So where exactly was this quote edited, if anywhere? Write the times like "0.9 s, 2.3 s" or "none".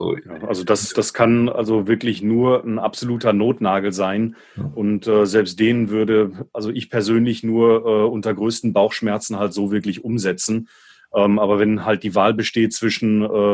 none